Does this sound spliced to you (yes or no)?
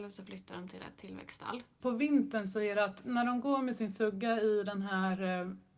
yes